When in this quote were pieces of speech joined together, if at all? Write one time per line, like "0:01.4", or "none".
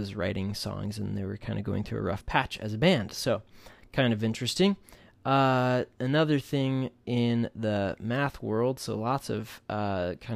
none

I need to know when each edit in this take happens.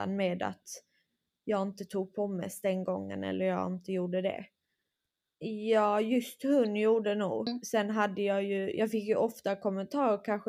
0:05.3

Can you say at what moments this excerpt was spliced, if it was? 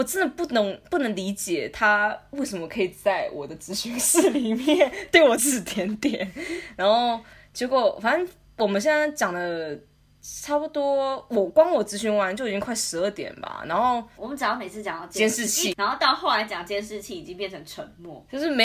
0:05.4
0:14.2
0:15.7

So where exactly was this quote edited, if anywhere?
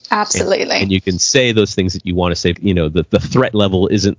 0:02.5

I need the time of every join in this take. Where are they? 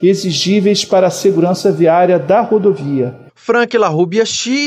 0:03.3

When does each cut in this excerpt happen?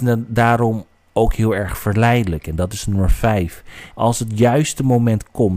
0:03.9

